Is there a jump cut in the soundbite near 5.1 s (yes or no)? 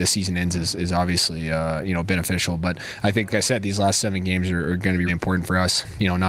yes